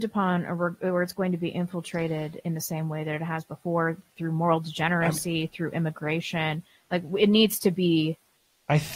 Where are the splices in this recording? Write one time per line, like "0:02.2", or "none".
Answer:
none